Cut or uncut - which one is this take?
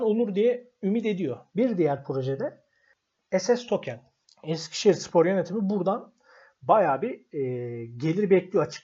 cut